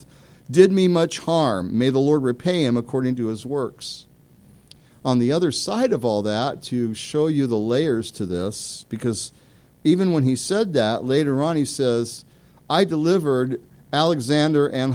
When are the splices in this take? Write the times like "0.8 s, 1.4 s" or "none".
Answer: none